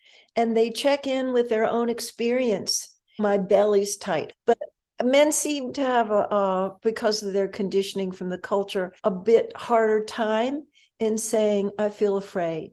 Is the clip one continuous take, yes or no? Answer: no